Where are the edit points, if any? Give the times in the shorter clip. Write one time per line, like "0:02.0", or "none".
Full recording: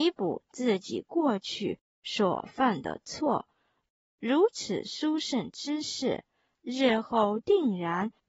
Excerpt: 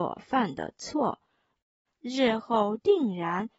0:01.8